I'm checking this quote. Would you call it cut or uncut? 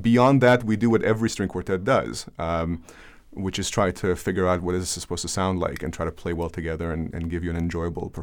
uncut